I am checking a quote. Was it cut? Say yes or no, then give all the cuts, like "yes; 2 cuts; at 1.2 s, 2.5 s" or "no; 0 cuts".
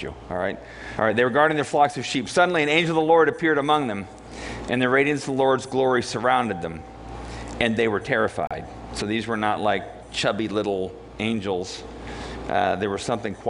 yes; 1 cut; at 1.0 s